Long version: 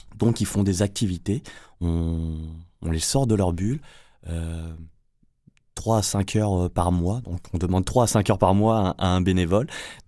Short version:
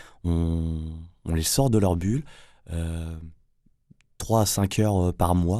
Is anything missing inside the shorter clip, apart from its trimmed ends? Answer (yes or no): no